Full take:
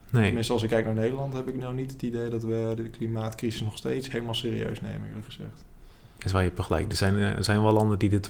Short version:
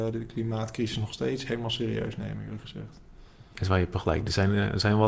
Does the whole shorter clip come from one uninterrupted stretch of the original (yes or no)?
yes